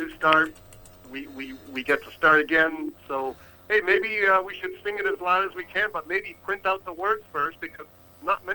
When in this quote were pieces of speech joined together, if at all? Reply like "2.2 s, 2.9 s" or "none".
none